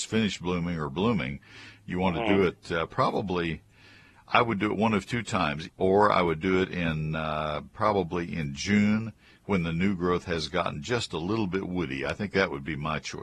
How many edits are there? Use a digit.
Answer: 1